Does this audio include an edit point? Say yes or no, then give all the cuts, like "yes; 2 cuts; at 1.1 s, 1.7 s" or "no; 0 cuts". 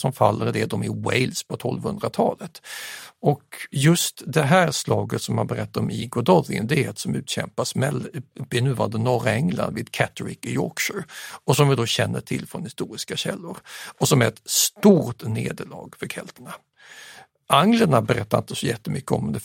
no; 0 cuts